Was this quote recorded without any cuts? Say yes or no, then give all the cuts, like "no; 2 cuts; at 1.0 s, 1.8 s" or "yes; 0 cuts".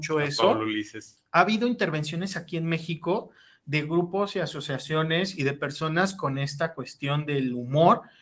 no; 1 cut; at 1.2 s